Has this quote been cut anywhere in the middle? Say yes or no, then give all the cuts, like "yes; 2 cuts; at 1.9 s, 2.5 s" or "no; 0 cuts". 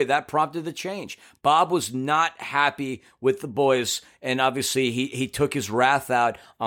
no; 0 cuts